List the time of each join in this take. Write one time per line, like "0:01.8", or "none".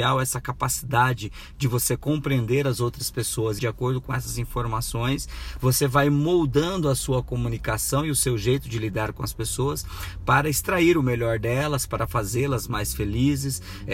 0:03.6